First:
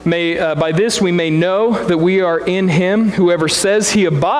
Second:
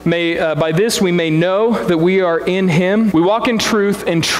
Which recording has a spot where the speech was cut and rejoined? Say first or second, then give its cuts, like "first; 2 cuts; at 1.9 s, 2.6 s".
second; 1 cut; at 3.1 s